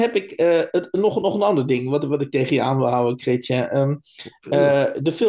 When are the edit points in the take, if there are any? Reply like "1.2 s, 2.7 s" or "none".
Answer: none

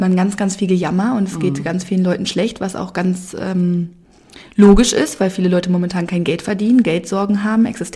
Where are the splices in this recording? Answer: none

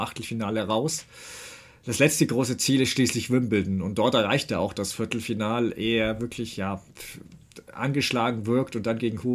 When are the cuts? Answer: none

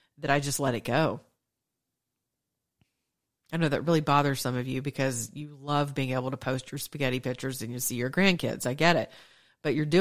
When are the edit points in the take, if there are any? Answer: none

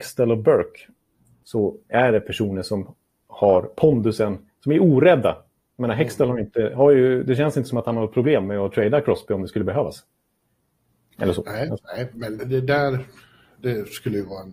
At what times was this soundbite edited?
12.4 s

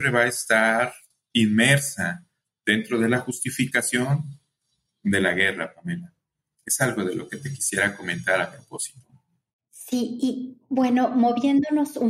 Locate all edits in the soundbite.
none

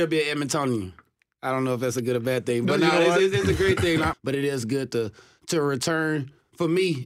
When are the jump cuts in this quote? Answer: 4.1 s

